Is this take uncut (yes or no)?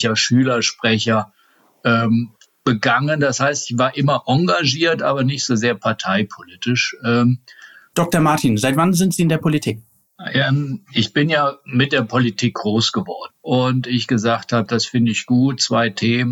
no